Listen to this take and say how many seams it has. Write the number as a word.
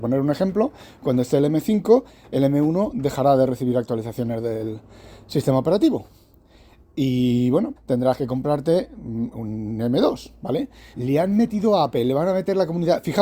two